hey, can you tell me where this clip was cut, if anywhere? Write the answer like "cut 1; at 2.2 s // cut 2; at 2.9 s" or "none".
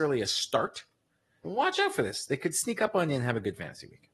cut 1; at 1.4 s